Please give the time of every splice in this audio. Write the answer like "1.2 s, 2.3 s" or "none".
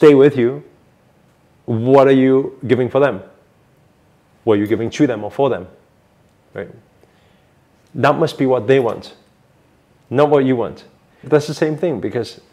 11.2 s